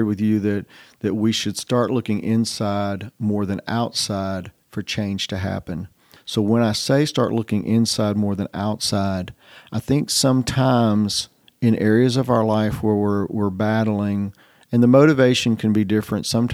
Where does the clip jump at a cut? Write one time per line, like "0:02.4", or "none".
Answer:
0:06.2